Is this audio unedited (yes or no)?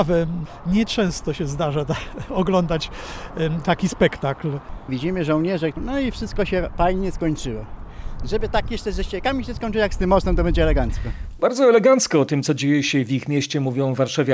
no